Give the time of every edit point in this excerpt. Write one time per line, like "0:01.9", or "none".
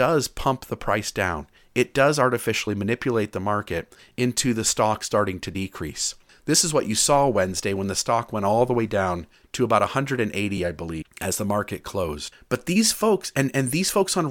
none